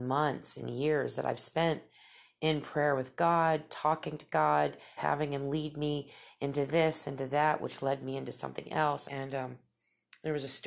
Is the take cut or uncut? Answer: cut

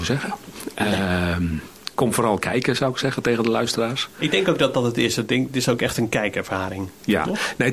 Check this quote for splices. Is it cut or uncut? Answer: cut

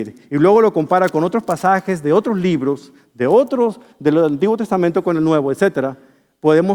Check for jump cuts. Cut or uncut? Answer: uncut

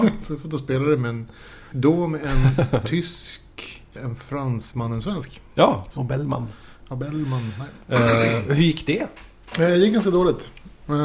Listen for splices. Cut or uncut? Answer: cut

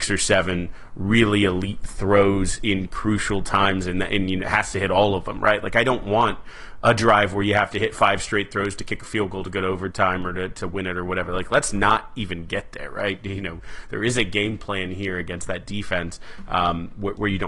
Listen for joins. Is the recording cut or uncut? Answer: uncut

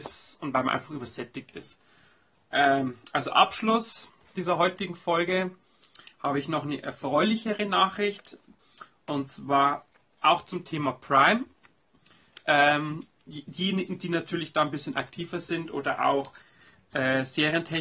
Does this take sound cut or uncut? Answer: uncut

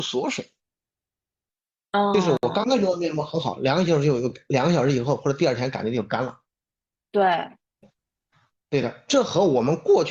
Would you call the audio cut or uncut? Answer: uncut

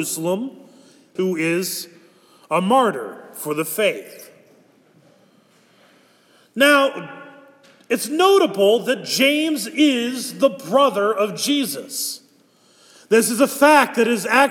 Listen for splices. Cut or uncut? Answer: cut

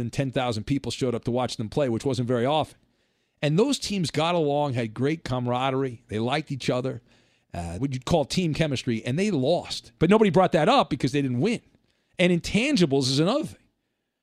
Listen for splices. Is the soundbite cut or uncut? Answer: cut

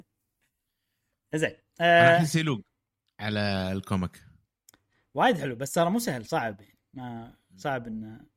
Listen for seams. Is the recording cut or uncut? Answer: uncut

